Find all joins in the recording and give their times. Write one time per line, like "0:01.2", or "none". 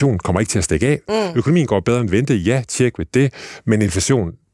0:01.1